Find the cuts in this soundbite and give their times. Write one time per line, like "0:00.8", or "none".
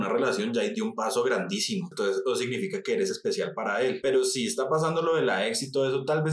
0:01.9